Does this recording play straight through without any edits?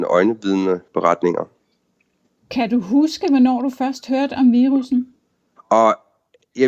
no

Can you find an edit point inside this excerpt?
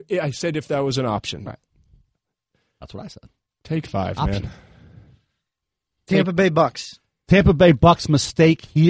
no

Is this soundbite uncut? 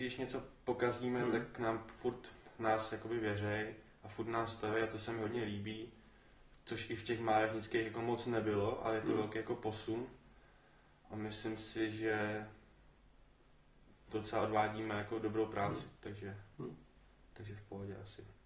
yes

